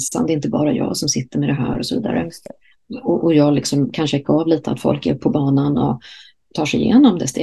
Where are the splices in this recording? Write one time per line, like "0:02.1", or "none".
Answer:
0:03.2